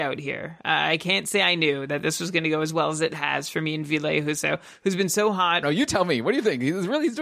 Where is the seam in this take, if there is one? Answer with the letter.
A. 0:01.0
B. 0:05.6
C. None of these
B